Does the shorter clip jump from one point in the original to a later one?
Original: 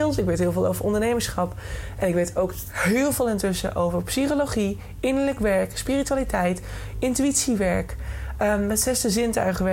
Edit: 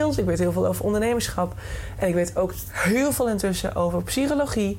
no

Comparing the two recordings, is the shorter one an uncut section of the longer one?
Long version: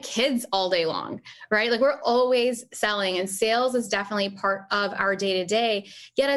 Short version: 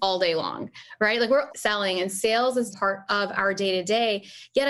no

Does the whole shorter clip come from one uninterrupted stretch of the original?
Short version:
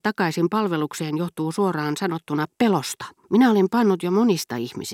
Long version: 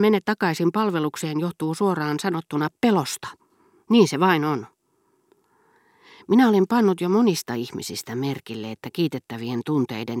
no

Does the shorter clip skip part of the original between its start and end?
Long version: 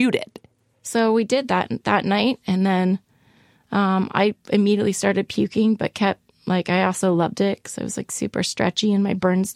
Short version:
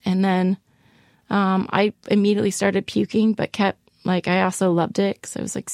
no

